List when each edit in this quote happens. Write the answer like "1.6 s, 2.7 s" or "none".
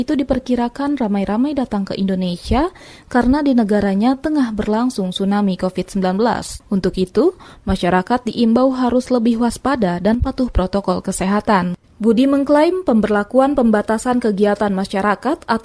6.6 s